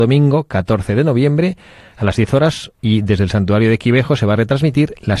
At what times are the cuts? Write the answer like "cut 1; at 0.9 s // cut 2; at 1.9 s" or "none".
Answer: cut 1; at 2.7 s

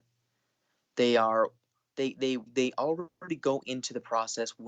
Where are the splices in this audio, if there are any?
cut 1; at 2.5 s

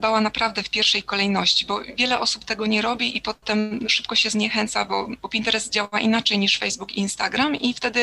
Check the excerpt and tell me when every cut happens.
none

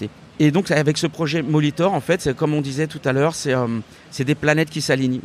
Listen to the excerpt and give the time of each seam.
none

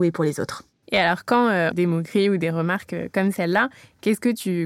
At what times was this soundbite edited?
cut 1; at 1.7 s

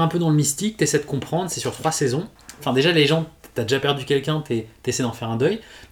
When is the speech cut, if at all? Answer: cut 1; at 2.6 s

